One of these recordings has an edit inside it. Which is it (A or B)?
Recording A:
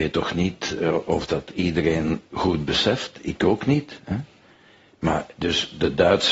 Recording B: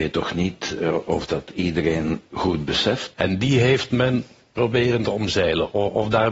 B